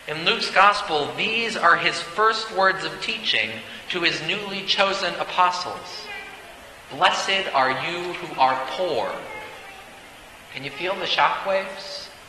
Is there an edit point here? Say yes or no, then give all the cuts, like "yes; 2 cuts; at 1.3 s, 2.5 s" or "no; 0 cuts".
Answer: no; 0 cuts